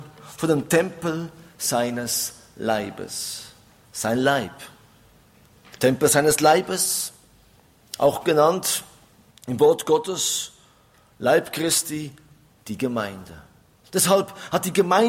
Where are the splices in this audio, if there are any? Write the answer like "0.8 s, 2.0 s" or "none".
13.8 s